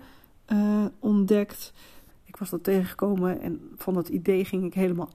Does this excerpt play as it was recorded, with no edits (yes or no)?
no